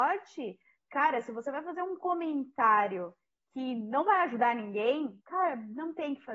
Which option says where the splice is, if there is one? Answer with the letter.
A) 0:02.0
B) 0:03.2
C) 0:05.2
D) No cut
C